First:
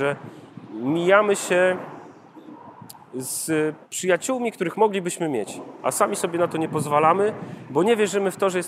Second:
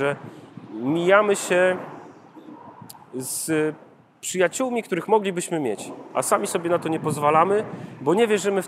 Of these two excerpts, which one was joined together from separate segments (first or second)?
first